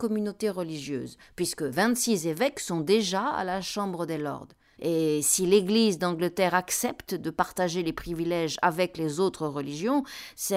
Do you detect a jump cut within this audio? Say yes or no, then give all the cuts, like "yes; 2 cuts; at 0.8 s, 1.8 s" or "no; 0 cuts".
yes; 1 cut; at 4.8 s